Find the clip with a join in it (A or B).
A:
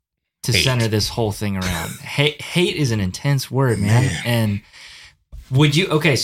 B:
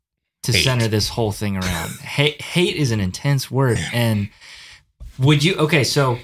B